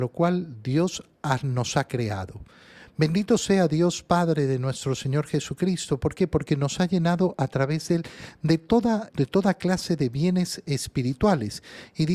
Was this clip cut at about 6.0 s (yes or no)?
no